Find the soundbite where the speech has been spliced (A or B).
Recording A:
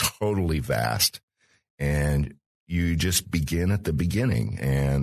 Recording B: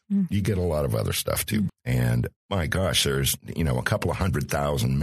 B